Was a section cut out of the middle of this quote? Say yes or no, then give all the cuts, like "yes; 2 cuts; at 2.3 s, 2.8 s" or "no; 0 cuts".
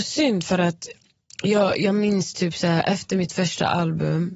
no; 0 cuts